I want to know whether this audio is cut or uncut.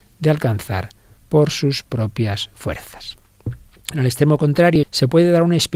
cut